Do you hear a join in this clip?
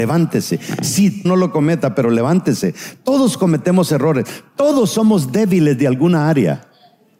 yes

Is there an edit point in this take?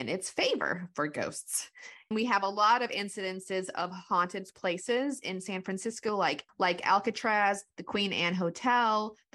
no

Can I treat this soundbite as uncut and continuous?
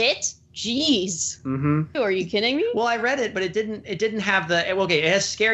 no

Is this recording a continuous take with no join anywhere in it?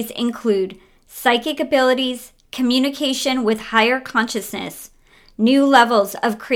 yes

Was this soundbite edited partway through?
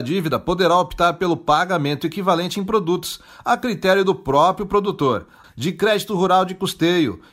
yes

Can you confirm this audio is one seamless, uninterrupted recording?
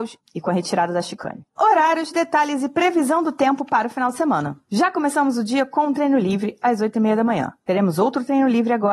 no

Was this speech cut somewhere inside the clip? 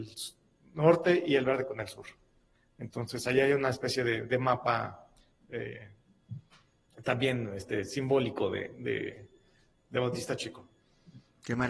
no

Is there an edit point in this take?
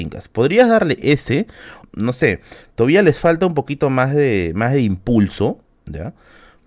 yes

